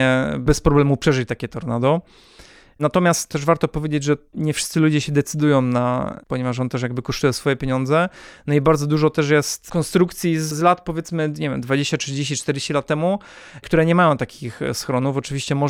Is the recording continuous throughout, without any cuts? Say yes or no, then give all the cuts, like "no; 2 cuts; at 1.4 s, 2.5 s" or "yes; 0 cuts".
no; 1 cut; at 6.2 s